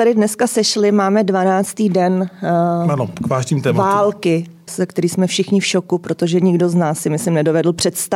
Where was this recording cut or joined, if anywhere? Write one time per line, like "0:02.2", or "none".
0:04.7